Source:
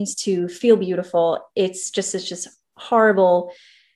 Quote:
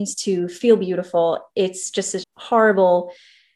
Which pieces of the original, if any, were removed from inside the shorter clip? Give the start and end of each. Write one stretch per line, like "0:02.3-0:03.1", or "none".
0:02.2-0:02.6